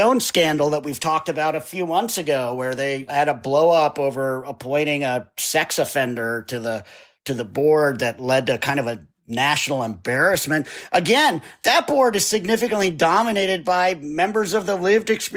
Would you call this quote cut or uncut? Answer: cut